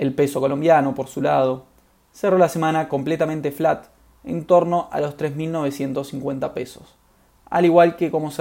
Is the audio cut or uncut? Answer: uncut